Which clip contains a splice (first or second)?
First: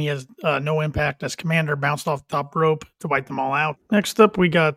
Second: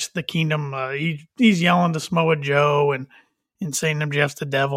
first